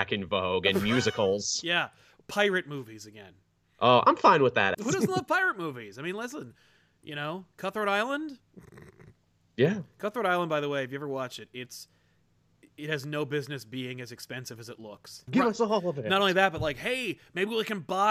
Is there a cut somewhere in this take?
yes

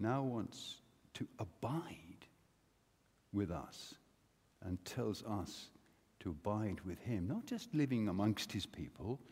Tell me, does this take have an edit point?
no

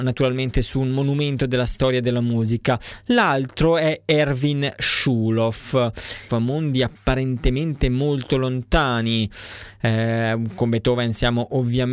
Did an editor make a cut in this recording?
yes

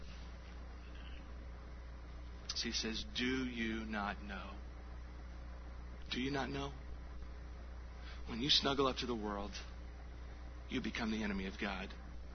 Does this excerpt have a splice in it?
yes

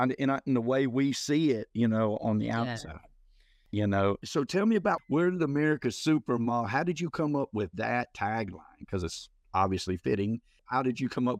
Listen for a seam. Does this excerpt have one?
no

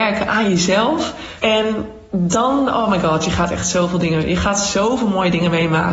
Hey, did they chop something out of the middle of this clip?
yes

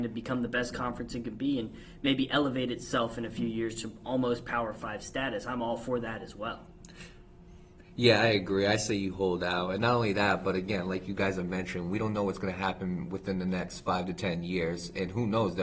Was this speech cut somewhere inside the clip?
no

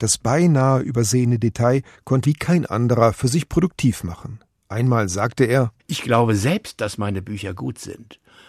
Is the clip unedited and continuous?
no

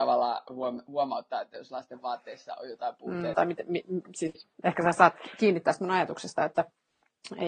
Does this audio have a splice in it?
yes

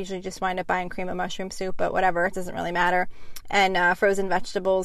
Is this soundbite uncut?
yes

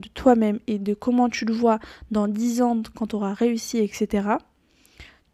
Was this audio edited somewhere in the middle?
no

